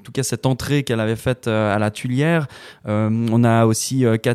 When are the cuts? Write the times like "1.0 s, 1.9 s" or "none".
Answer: none